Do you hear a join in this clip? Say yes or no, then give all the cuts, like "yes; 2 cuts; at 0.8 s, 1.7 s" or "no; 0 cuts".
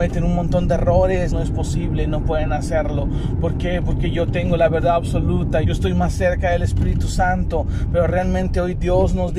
yes; 2 cuts; at 1.3 s, 5.6 s